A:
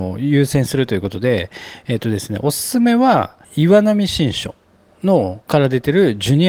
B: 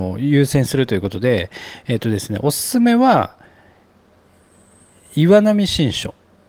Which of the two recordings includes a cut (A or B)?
A